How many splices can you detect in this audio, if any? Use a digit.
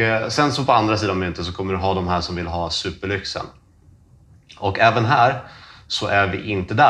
0